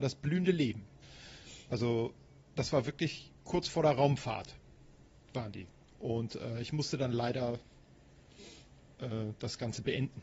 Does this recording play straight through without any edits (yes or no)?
yes